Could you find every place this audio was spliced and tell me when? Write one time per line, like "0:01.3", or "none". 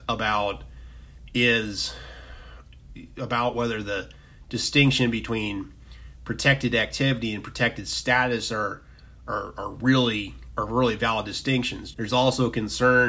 0:11.9